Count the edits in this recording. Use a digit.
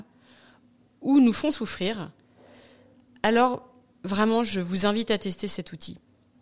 0